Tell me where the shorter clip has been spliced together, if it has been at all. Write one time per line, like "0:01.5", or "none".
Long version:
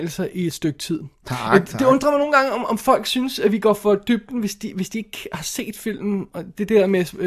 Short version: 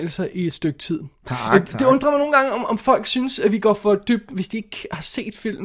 0:04.3